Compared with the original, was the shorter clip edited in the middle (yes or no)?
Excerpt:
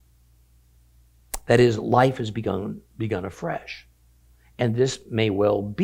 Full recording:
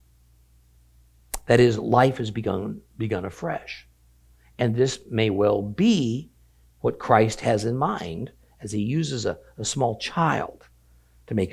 no